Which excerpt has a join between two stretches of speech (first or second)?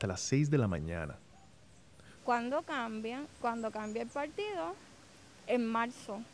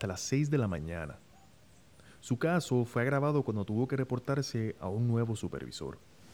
first